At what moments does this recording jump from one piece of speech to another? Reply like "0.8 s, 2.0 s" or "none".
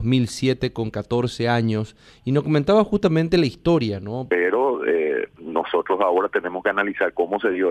4.3 s